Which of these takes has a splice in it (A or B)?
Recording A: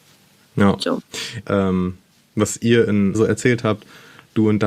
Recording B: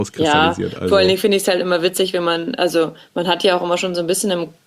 A